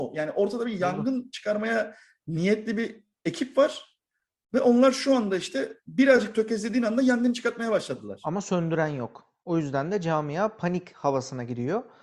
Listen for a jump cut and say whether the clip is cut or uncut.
uncut